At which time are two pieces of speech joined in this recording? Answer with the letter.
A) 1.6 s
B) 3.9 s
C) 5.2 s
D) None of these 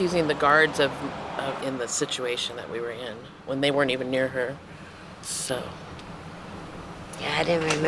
A